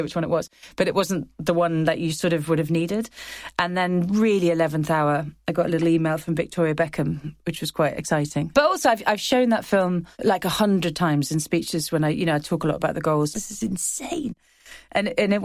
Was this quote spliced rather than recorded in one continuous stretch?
yes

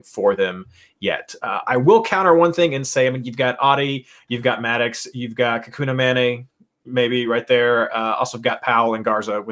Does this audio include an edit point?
no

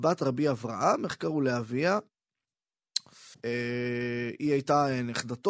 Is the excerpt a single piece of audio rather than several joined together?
no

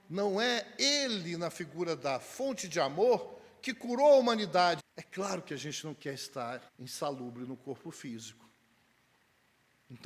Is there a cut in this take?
yes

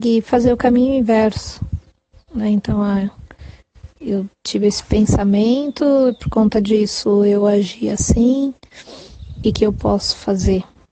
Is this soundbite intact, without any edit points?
no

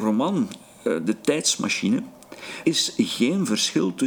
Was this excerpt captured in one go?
no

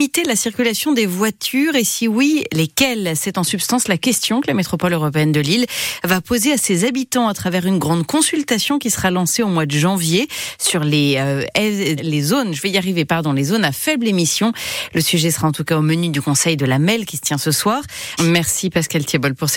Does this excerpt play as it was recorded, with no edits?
no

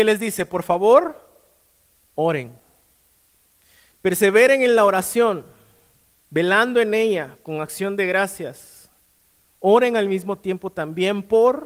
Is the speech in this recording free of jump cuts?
no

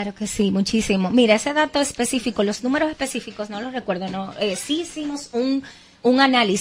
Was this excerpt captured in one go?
yes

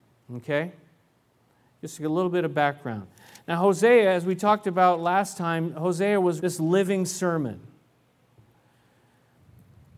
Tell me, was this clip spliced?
yes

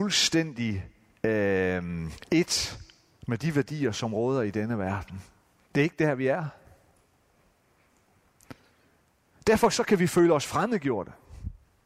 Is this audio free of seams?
yes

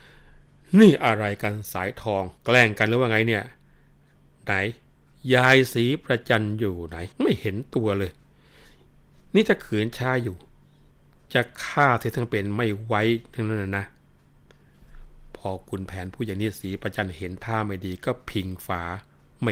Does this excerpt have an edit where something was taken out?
yes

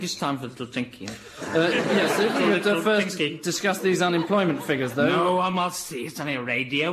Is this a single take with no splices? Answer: yes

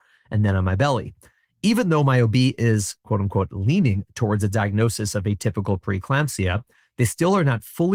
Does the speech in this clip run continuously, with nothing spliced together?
yes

